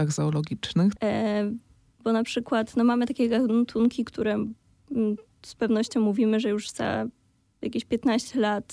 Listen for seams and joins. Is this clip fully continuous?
no; 1 cut; at 1.0 s

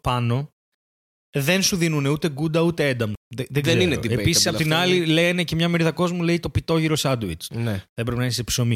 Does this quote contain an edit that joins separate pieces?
yes; 2 cuts; at 3.2 s, 7.5 s

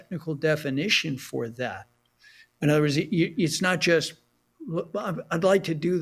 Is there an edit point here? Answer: no; 0 cuts

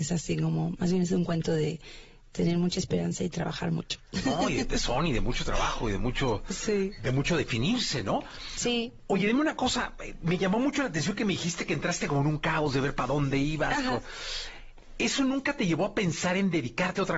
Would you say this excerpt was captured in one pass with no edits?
yes; 0 cuts

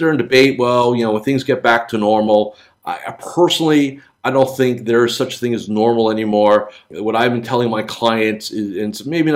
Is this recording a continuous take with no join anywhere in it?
yes; 0 cuts

